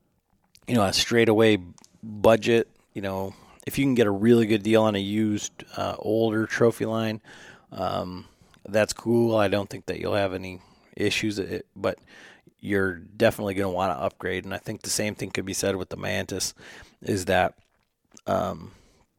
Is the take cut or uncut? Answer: uncut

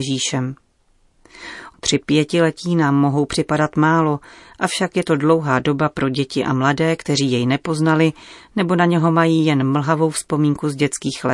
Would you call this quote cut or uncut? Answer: cut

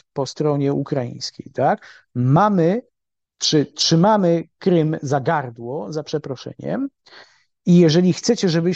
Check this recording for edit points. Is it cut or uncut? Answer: uncut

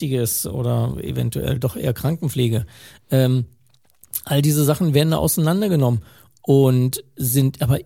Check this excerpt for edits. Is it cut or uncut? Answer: uncut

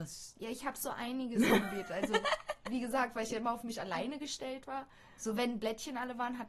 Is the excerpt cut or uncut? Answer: uncut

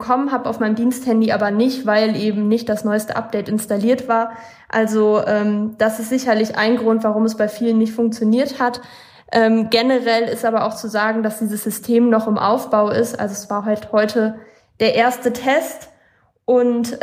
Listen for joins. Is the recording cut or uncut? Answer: uncut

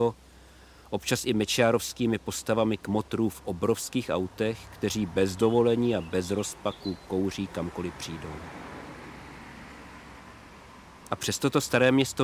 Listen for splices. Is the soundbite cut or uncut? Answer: uncut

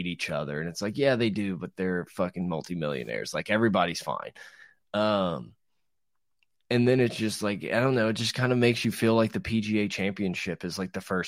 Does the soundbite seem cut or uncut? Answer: uncut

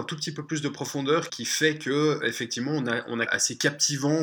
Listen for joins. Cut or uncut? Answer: cut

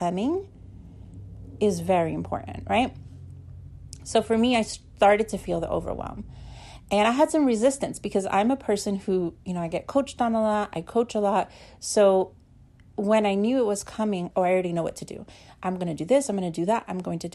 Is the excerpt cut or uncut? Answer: cut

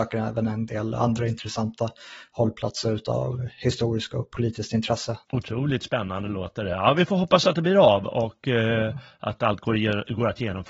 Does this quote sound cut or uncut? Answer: cut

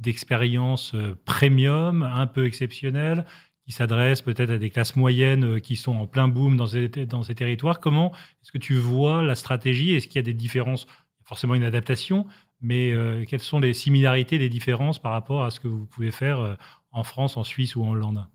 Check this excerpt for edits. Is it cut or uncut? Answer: uncut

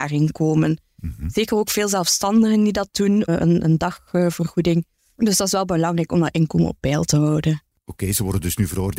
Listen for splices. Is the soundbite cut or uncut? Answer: cut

